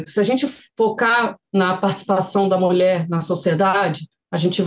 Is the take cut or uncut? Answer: uncut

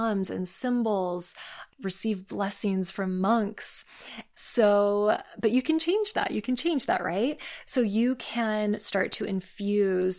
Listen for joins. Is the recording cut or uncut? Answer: cut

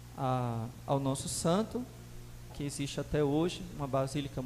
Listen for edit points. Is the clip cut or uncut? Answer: cut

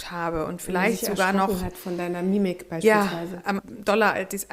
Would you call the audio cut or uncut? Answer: cut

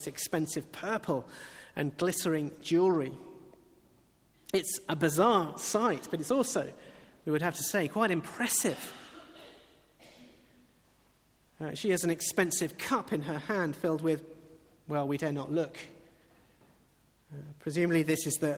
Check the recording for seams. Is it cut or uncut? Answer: uncut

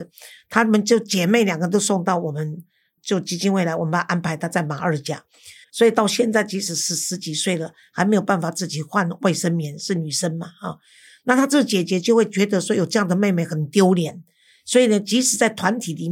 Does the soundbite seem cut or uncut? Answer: cut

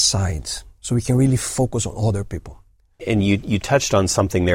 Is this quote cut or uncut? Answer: cut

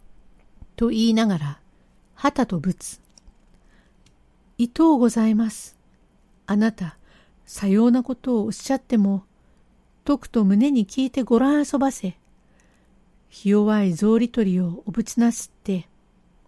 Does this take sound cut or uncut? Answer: uncut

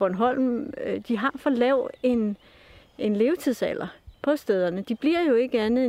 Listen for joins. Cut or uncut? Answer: cut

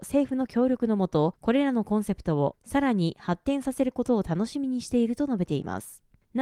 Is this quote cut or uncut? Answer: uncut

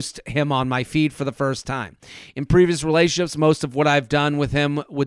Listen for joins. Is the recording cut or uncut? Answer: uncut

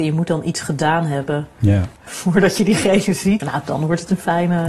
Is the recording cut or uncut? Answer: cut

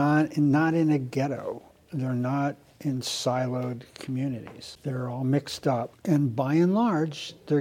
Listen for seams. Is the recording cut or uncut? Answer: uncut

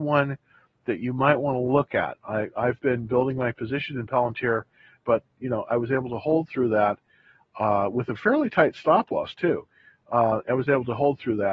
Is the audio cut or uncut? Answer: cut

